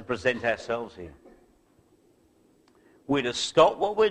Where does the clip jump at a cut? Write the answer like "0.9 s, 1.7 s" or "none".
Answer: none